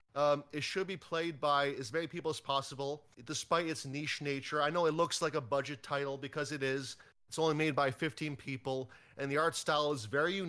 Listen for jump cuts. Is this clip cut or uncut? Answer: cut